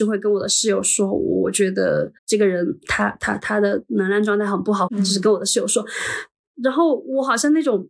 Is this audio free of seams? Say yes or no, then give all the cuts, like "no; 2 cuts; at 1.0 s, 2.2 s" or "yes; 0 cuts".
no; 2 cuts; at 2.2 s, 4.9 s